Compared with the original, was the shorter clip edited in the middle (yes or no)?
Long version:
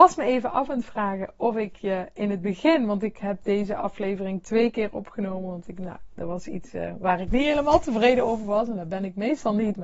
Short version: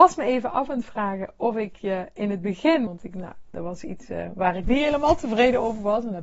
yes